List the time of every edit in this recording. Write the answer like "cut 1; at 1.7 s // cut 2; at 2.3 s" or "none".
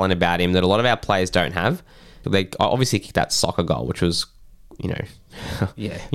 cut 1; at 2.2 s

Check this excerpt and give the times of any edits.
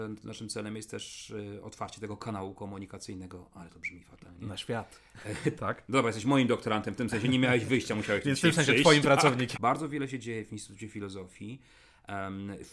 cut 1; at 5.6 s // cut 2; at 9.5 s

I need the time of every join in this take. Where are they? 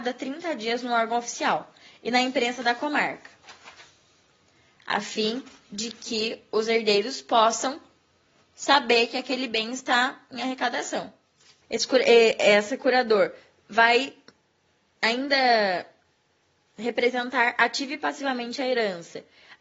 cut 1; at 11.6 s

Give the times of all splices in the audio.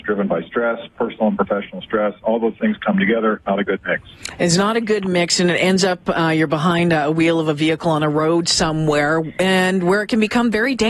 none

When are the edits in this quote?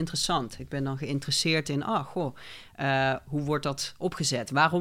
none

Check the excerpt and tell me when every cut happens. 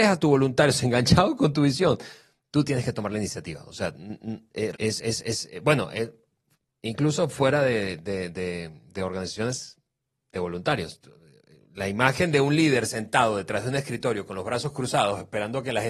cut 1; at 4.7 s

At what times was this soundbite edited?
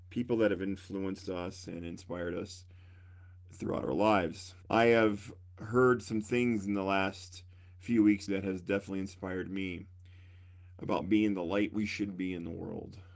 cut 1; at 4.7 s // cut 2; at 8.3 s

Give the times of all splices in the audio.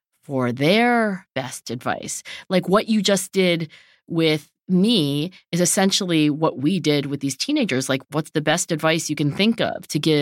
none

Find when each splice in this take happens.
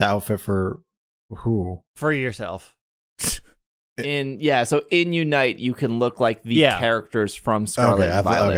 cut 1; at 1.9 s

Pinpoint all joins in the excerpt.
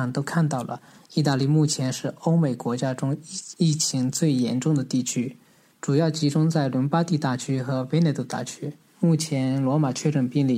cut 1; at 8.9 s

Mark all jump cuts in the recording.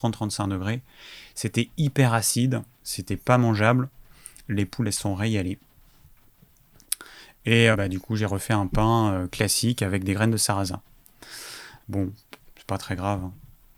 cut 1; at 7.7 s // cut 2; at 11.8 s

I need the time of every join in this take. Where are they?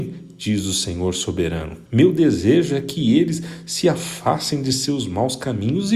cut 1; at 1.8 s

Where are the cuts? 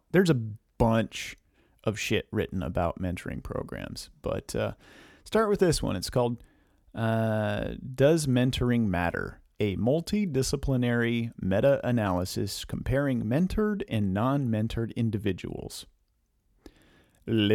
none

